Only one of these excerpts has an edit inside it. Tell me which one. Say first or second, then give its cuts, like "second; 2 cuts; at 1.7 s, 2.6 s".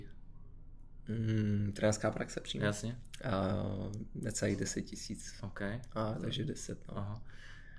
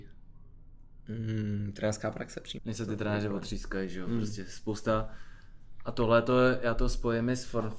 second; 1 cut; at 2.6 s